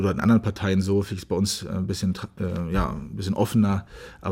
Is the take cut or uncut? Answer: uncut